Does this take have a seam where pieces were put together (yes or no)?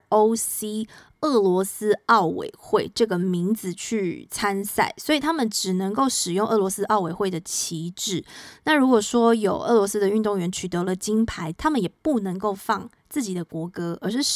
yes